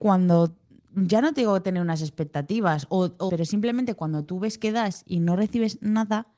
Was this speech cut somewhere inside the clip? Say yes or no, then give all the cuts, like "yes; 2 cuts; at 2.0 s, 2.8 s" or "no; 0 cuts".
yes; 1 cut; at 3.3 s